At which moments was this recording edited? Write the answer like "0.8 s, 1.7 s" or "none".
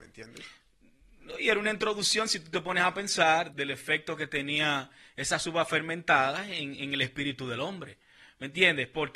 3.5 s